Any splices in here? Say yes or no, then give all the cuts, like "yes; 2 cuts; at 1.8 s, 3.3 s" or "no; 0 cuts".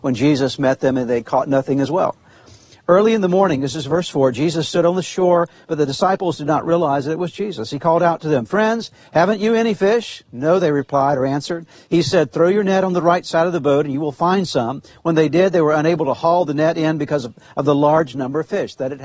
no; 0 cuts